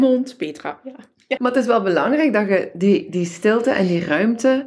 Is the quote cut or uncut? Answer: cut